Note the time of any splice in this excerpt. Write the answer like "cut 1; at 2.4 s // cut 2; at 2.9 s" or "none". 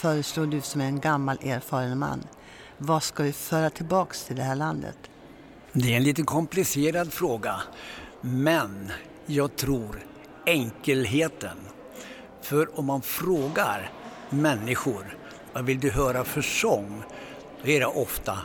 cut 1; at 5.6 s // cut 2; at 15.4 s